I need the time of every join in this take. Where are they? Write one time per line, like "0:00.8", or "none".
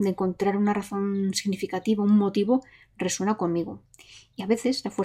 none